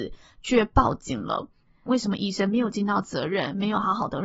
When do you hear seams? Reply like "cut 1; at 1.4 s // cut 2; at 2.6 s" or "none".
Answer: cut 1; at 1.9 s